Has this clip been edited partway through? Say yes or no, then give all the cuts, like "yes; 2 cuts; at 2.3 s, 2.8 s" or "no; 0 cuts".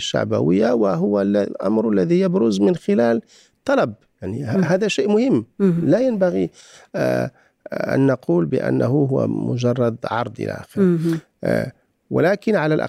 no; 0 cuts